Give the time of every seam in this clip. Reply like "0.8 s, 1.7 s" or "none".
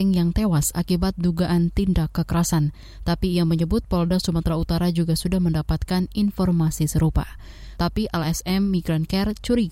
7.8 s